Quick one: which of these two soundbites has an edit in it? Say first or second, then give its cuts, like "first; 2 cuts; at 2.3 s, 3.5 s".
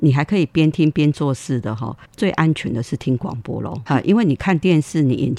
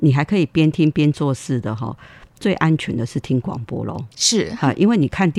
first; 2 cuts; at 2.0 s, 3.9 s